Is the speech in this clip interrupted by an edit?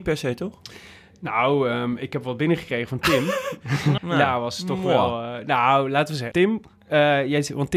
yes; 2 cuts; at 4.0 s, 6.3 s

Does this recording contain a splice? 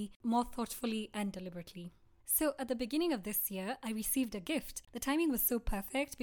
yes; 1 cut; at 4.8 s

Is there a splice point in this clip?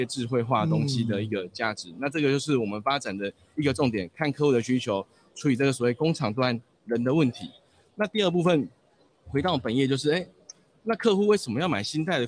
no; 0 cuts

